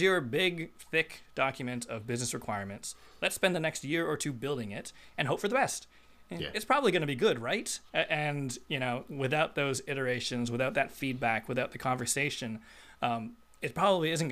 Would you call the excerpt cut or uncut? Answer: uncut